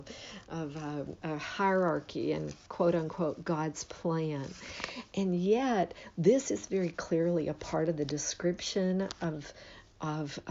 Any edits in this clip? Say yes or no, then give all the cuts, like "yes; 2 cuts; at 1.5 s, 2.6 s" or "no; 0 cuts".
yes; 1 cut; at 1.2 s